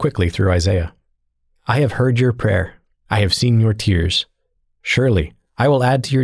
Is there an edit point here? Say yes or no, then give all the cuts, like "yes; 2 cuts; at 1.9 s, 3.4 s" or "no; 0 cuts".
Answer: no; 0 cuts